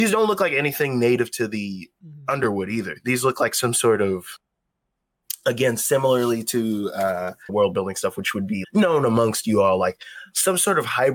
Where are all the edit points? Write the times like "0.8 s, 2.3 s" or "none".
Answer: 7.5 s, 8.6 s